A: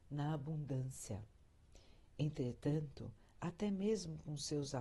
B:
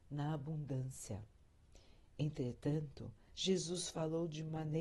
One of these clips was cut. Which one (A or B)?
B